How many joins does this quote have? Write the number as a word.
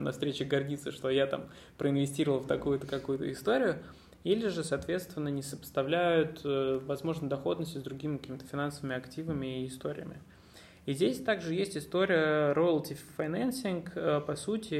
zero